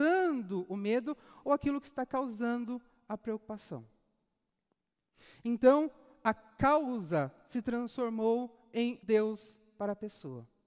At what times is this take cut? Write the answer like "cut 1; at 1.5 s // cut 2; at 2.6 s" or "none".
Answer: cut 1; at 9.0 s